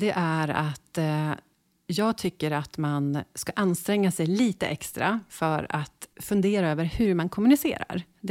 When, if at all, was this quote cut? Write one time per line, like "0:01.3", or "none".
0:06.1